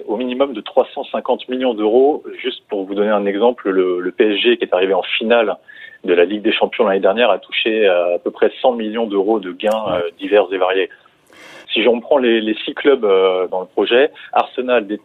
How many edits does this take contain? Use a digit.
2